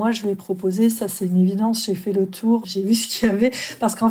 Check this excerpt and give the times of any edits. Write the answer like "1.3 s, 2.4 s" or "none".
2.6 s